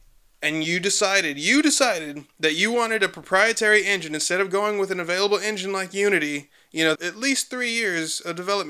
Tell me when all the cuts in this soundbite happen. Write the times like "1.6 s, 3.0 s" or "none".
6.9 s